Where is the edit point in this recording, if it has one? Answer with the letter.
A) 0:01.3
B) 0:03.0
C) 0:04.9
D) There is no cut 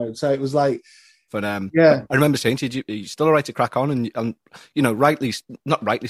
A